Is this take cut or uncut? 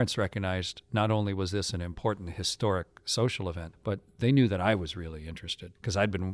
uncut